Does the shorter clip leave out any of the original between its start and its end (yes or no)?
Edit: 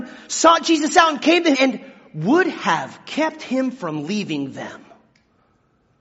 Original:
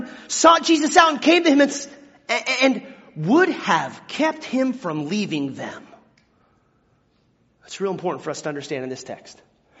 yes